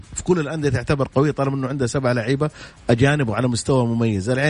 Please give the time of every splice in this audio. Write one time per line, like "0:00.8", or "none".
none